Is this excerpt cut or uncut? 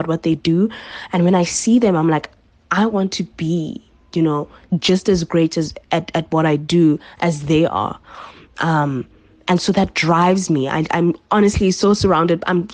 uncut